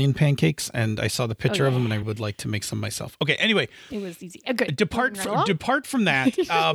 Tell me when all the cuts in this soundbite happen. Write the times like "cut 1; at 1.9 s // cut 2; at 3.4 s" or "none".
cut 1; at 2.0 s